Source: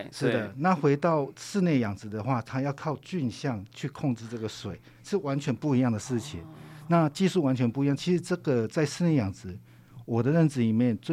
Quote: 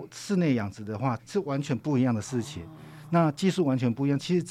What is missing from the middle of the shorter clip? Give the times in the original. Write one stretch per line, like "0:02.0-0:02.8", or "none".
0:02.4-0:05.0